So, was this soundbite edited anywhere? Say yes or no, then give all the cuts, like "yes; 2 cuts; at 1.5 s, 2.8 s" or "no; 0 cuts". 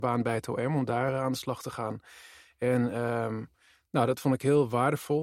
no; 0 cuts